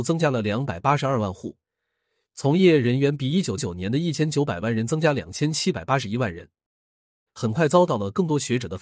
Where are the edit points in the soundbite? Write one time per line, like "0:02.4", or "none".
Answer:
0:03.6
0:07.3